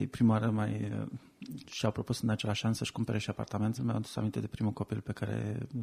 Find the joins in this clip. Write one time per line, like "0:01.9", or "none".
0:01.6
0:03.8